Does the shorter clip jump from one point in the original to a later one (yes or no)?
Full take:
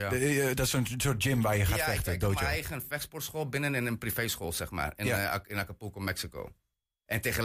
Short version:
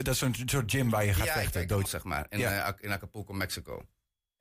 yes